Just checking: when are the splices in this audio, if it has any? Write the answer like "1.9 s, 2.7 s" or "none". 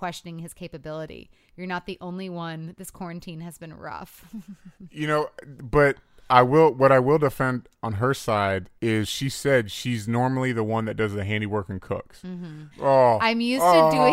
8.8 s, 12.7 s